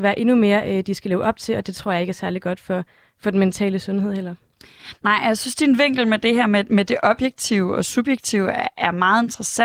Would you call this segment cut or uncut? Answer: uncut